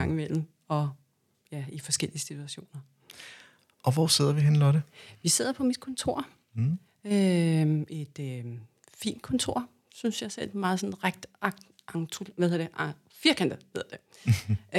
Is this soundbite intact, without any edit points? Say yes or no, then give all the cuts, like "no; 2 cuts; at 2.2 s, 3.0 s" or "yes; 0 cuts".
yes; 0 cuts